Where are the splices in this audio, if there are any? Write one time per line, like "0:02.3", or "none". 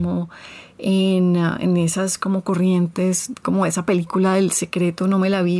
0:03.3

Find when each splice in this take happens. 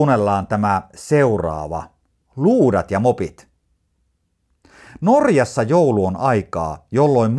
none

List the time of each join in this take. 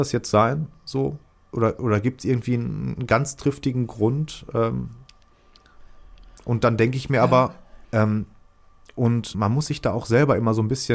0:07.8
0:09.3

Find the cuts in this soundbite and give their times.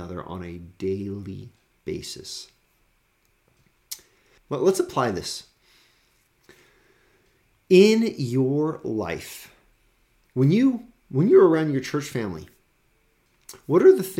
0:04.4

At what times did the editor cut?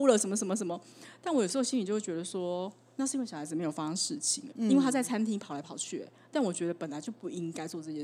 0:04.5

